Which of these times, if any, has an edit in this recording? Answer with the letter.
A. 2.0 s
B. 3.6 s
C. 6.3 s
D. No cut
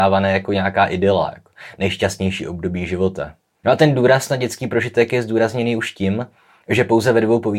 B